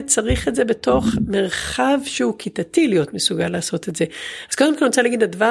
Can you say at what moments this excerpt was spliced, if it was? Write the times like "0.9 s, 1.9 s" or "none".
none